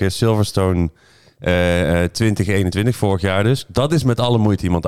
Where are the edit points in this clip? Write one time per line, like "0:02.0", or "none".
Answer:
none

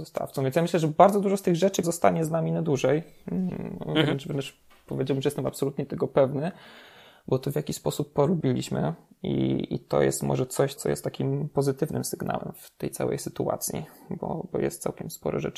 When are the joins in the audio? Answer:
0:01.8
0:10.8

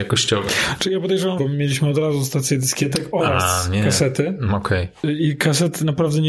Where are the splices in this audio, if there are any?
0:01.4

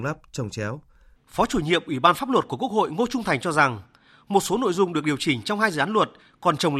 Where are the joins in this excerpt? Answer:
0:01.1

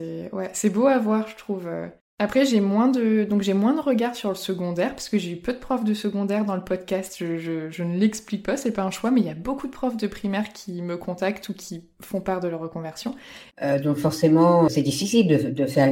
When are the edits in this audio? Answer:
0:13.5
0:14.7

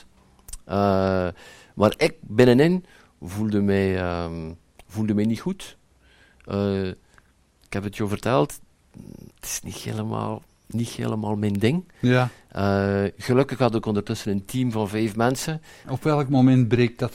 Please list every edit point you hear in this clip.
0:09.3
0:15.8

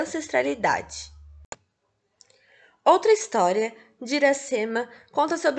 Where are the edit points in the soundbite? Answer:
none

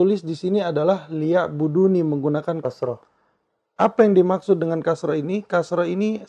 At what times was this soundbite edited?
0:02.6

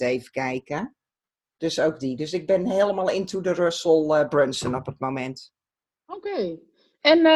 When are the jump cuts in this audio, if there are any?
none

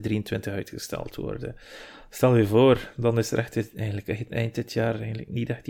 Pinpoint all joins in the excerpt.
none

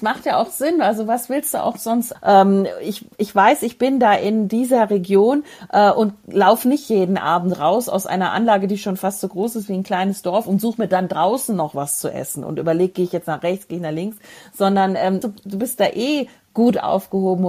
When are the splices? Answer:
0:02.2
0:15.2

